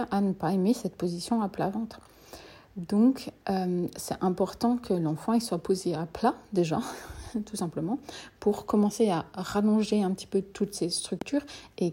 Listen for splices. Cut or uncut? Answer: uncut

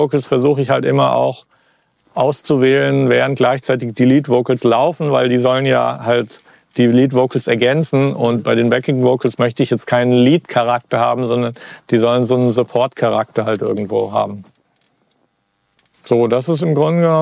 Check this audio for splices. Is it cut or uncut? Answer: uncut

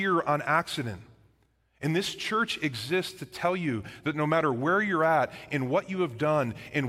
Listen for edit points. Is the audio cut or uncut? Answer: uncut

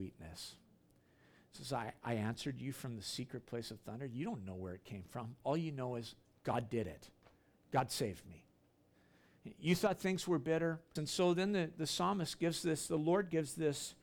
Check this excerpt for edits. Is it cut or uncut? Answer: cut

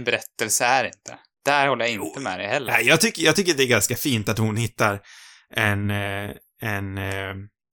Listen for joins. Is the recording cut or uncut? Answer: uncut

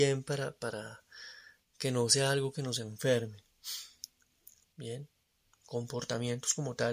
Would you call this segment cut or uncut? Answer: cut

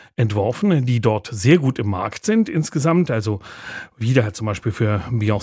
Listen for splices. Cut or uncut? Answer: uncut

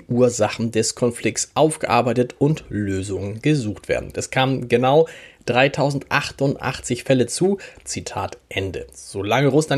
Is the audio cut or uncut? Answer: cut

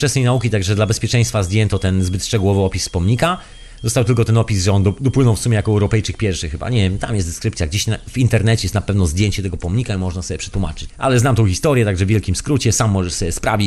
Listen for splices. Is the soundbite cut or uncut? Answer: cut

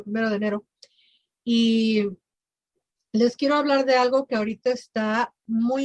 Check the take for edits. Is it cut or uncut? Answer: uncut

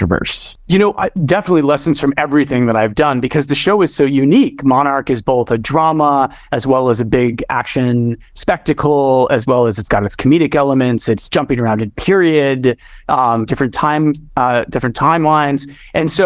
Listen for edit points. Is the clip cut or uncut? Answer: uncut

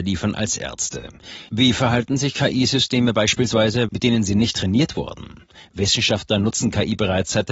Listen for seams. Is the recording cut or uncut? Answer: cut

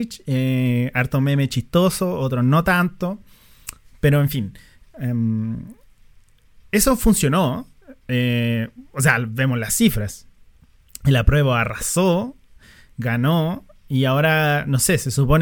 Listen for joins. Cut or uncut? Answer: uncut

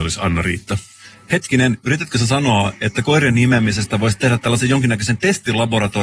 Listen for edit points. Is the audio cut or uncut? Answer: uncut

